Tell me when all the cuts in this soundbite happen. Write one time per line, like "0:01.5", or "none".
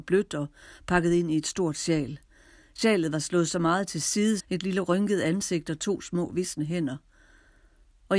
0:04.4